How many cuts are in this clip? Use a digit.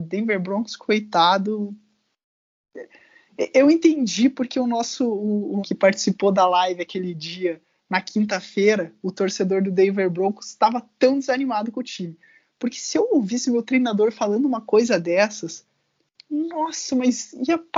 1